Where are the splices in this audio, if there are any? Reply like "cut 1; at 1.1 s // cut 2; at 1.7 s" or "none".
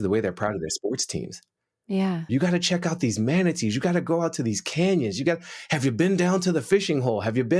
cut 1; at 2.3 s

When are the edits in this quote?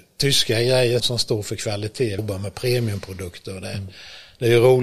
cut 1; at 1.0 s // cut 2; at 2.2 s

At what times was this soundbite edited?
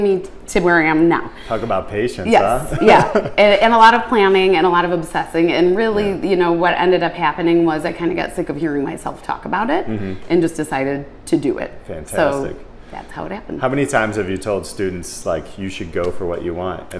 none

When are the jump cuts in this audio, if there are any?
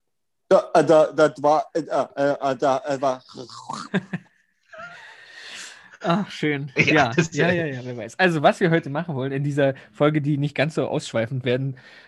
cut 1; at 6.8 s

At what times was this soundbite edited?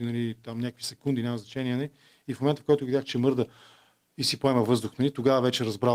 none

